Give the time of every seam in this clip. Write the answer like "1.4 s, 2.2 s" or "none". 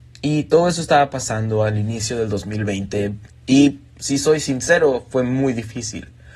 3.3 s